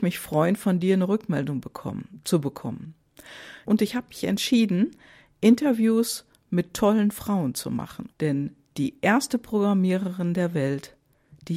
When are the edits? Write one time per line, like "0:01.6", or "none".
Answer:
0:03.6
0:08.1

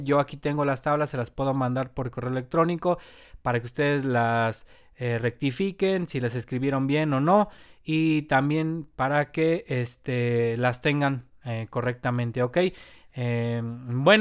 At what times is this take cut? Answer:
none

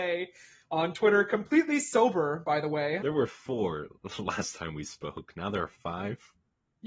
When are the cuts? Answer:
0:03.0

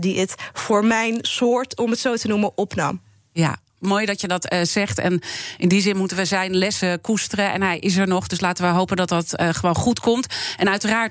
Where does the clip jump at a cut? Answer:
0:03.8

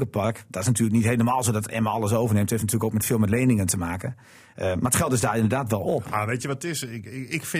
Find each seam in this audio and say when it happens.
none

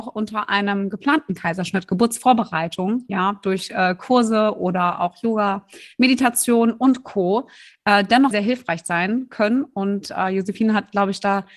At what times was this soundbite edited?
0:08.3

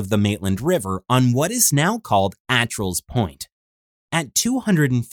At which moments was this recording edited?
none

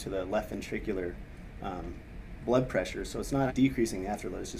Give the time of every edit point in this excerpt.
0:03.5

